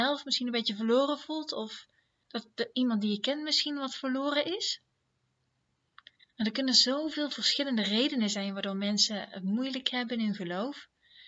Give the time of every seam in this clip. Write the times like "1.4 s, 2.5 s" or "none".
none